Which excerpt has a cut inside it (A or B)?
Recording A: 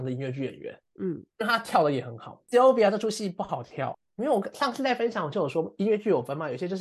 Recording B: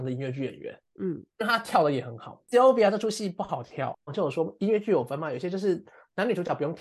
B